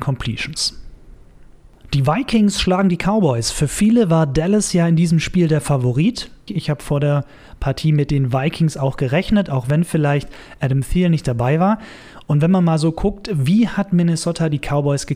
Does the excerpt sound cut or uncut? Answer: cut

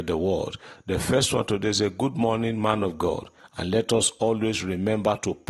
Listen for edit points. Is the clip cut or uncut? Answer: cut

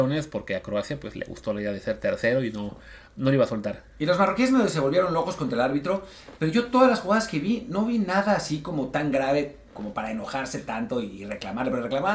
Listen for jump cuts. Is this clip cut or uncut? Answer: uncut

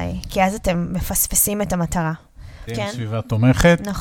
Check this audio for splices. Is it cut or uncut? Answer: cut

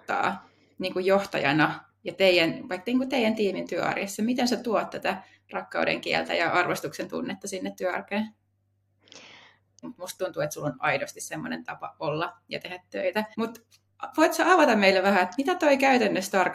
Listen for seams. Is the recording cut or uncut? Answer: cut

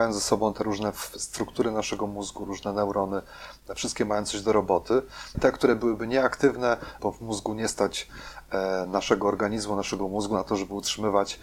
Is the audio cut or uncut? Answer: cut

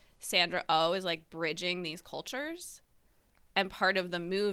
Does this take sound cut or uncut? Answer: uncut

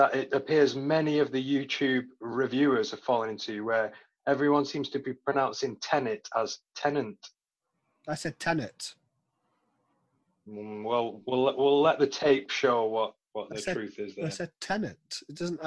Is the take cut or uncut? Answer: uncut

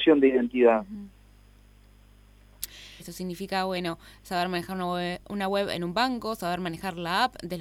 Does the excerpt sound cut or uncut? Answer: cut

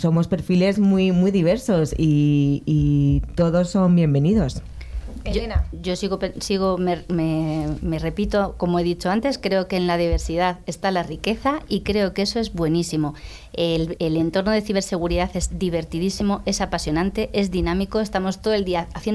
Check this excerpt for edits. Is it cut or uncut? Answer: cut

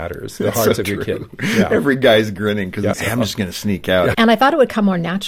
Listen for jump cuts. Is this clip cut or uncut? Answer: cut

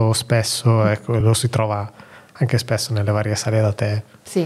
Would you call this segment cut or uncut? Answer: uncut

